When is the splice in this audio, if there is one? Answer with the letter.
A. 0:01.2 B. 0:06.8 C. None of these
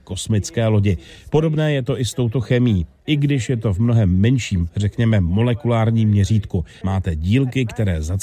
B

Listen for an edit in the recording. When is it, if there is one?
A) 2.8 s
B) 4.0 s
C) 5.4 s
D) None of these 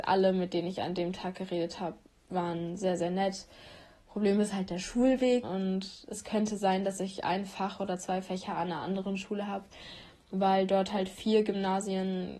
C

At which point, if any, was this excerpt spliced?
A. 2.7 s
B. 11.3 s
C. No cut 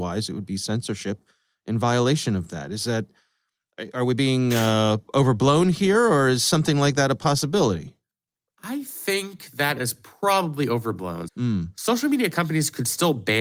B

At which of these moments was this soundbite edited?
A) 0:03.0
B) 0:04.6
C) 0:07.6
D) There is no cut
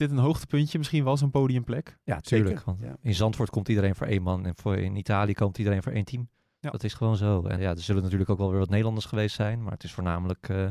C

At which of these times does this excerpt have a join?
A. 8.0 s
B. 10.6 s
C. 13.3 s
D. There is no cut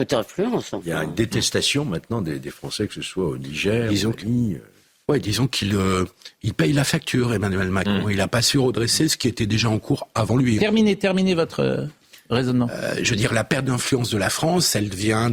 B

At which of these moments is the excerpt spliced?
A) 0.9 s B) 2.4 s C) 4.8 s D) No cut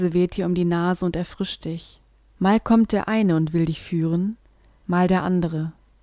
B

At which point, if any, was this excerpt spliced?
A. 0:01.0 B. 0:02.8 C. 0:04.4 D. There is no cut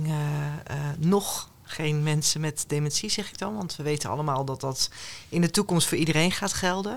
D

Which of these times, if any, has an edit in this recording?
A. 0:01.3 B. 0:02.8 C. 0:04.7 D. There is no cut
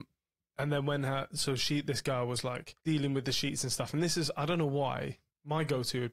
B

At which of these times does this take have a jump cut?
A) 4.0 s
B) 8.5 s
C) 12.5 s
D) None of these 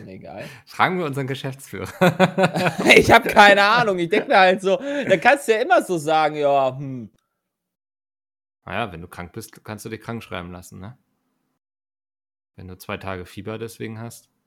B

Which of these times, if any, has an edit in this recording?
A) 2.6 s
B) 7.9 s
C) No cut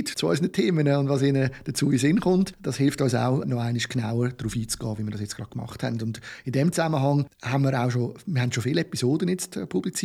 C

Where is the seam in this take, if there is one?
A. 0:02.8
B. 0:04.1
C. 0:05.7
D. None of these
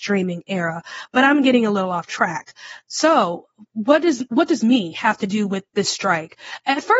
C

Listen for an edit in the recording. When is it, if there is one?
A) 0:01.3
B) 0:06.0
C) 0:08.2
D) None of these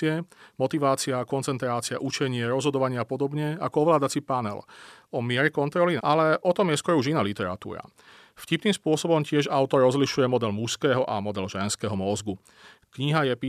B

